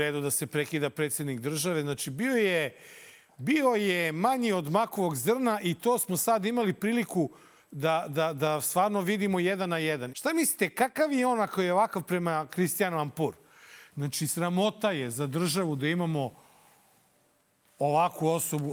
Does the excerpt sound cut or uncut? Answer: cut